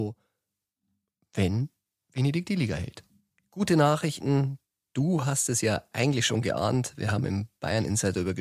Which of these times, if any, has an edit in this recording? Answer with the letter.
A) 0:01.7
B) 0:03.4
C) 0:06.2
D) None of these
B